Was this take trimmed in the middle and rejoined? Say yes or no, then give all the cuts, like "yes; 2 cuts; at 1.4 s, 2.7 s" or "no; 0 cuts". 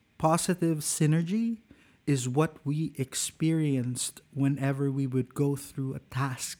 no; 0 cuts